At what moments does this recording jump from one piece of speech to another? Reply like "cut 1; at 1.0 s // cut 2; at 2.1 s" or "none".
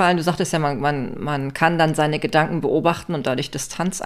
none

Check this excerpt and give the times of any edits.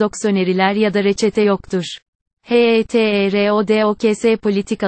cut 1; at 2.3 s

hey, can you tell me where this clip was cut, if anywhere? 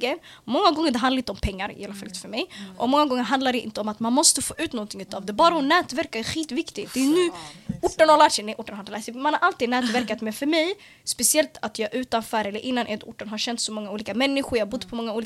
none

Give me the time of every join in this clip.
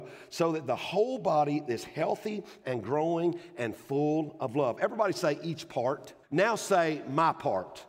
cut 1; at 6.2 s

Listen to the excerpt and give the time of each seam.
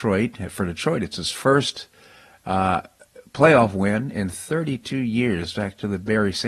none

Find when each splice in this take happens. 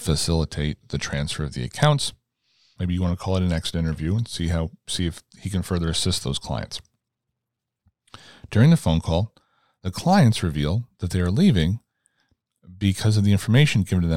cut 1; at 2.8 s

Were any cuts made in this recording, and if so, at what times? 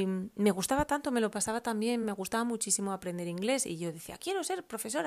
none

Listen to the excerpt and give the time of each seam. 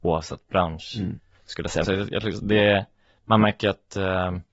cut 1; at 1.8 s

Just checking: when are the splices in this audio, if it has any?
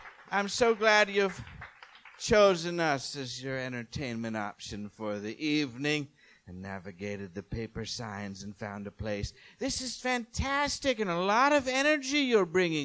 none

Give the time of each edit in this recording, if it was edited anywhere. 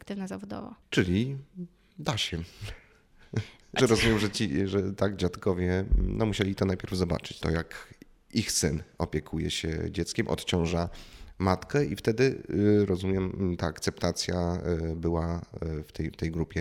cut 1; at 3.8 s // cut 2; at 7.4 s

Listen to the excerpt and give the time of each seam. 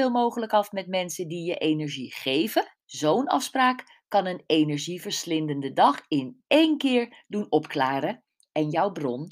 cut 1; at 2.8 s

